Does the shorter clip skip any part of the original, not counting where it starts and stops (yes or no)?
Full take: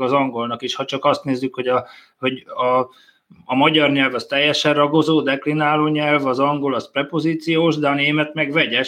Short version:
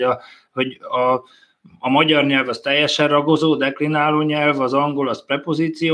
no